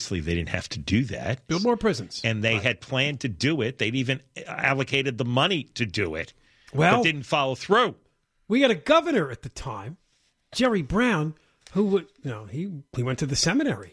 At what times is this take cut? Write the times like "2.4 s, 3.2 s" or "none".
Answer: 1.5 s